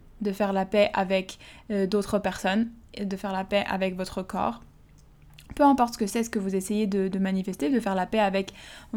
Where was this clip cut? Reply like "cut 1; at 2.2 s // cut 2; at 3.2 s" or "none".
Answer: none